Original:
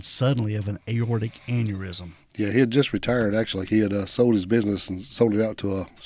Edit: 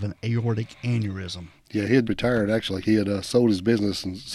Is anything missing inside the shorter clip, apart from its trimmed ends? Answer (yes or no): yes